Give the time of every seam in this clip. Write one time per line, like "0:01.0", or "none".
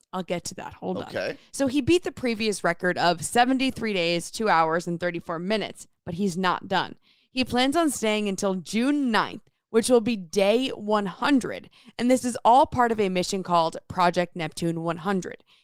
none